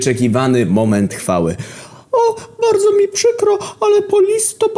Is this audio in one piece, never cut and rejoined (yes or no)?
yes